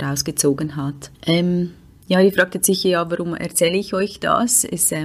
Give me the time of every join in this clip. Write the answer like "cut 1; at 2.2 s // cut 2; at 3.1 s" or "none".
cut 1; at 1.1 s